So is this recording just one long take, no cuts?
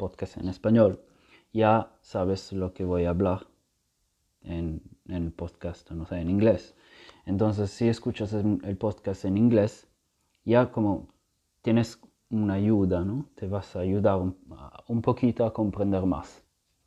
yes; 0 cuts

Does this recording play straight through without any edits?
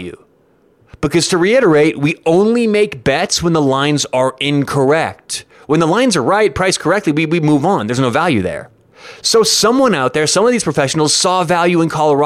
yes; 0 cuts

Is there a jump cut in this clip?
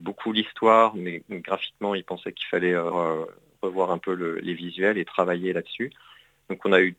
yes; 1 cut; at 2.9 s

